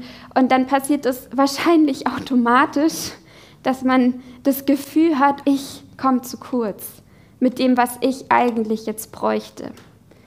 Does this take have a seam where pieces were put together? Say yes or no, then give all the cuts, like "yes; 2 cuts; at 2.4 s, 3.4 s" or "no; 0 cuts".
yes; 1 cut; at 5.4 s